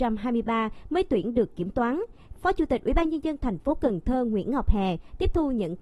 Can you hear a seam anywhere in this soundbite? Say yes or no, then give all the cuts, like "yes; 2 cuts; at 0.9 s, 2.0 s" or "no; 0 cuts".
yes; 1 cut; at 2.4 s